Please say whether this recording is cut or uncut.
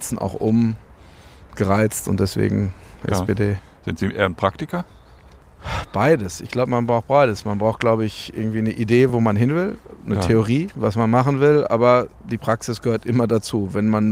uncut